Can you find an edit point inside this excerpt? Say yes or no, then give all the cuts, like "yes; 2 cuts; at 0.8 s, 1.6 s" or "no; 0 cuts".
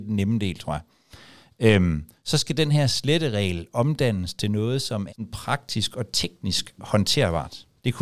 yes; 1 cut; at 5.1 s